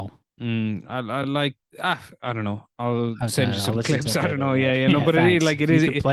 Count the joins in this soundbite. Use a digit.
0